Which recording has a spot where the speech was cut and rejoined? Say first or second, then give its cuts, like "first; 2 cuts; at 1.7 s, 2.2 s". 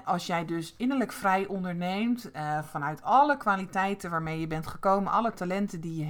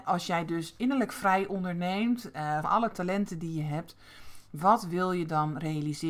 second; 1 cut; at 2.6 s